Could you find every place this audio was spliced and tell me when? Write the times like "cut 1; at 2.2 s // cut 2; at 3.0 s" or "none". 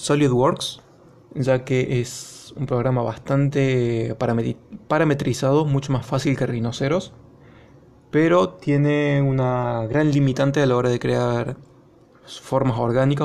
none